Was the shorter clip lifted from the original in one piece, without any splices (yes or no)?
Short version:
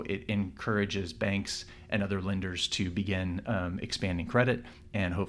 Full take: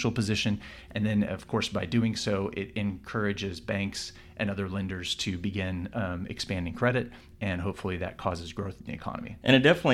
yes